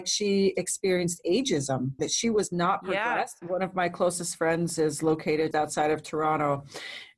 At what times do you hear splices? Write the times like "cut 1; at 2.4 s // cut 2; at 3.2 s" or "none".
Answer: cut 1; at 2.0 s // cut 2; at 3.4 s // cut 3; at 5.5 s